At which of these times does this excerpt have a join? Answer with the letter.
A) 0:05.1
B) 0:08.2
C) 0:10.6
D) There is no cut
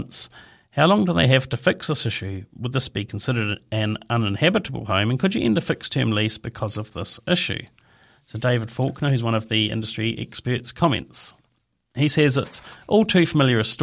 D